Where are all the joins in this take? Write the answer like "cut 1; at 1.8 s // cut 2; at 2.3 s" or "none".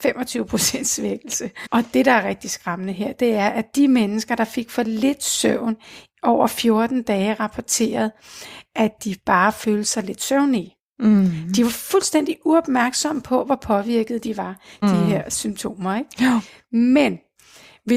cut 1; at 1.6 s // cut 2; at 14.8 s